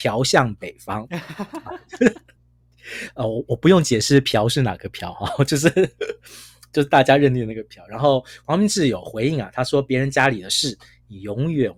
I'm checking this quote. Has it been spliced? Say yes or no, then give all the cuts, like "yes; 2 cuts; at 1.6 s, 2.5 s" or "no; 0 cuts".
no; 0 cuts